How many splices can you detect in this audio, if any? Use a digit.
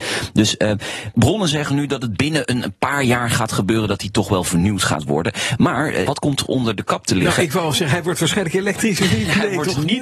1